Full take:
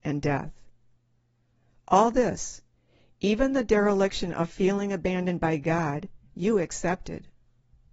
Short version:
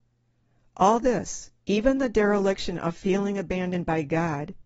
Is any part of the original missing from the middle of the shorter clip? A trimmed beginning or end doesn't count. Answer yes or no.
yes